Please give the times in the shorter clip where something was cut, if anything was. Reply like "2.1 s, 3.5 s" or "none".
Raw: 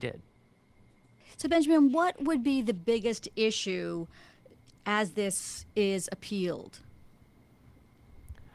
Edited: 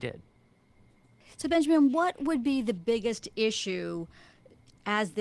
none